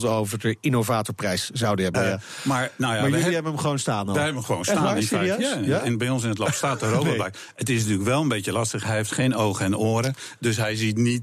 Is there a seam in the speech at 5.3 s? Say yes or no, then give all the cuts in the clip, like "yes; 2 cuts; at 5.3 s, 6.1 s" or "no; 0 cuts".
no; 1 cut; at 1.9 s